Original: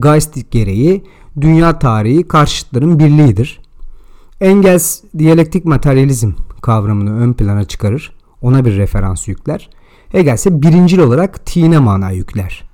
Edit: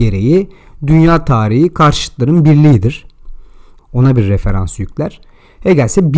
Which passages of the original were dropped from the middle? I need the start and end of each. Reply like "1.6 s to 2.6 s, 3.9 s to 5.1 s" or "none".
4.3 s to 8.3 s